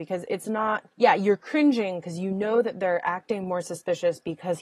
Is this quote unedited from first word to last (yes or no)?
no